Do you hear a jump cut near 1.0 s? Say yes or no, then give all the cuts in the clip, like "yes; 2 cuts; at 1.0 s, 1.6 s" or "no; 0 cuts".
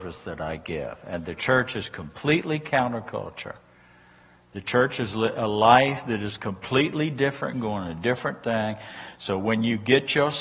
no; 1 cut; at 7.5 s